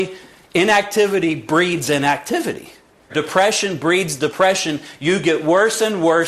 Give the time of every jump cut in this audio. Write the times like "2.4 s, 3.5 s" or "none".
3.1 s